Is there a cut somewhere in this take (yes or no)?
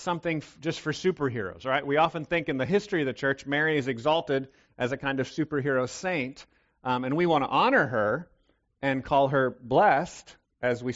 no